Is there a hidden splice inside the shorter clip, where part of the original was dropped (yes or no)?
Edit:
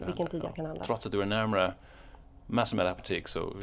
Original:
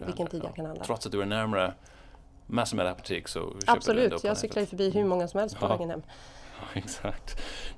no